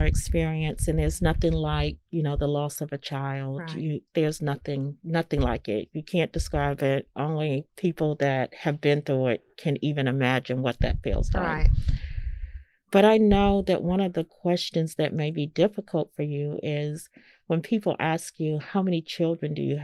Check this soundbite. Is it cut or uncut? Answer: uncut